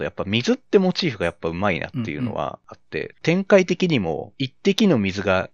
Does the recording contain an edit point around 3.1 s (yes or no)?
yes